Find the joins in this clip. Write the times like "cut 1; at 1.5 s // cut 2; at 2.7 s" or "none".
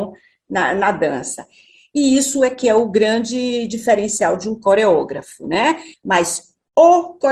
cut 1; at 5.9 s